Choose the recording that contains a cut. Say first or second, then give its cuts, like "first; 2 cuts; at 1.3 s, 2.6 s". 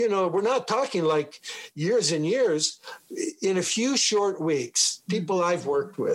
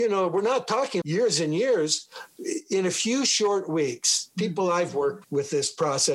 second; 2 cuts; at 1.0 s, 5.2 s